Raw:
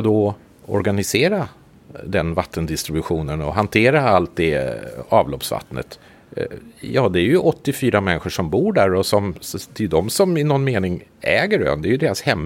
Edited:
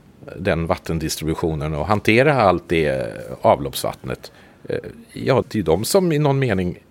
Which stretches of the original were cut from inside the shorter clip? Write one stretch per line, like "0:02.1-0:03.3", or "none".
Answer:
0:07.1-0:09.7